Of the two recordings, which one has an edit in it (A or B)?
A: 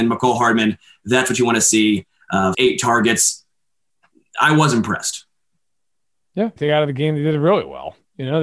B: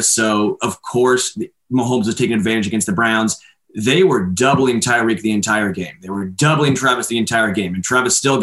A